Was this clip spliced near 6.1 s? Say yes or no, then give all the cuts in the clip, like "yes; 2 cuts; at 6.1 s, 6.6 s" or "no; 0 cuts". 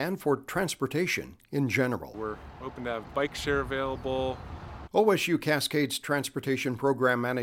no; 2 cuts; at 2.1 s, 4.9 s